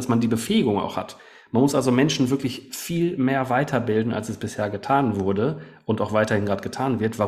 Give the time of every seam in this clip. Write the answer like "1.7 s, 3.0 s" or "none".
none